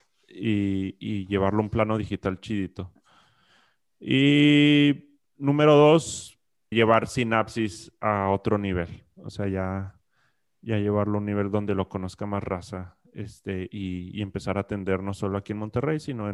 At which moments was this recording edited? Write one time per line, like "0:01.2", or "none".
0:06.7